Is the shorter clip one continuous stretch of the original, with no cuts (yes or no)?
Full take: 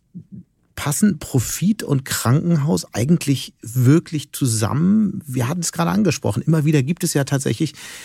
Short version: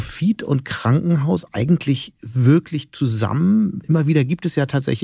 no